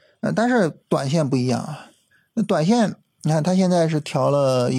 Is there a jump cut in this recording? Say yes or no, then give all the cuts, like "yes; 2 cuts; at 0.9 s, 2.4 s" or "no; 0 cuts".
no; 0 cuts